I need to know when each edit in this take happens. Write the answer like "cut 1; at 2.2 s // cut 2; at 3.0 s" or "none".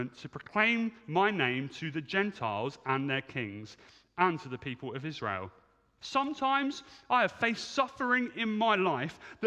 cut 1; at 6.0 s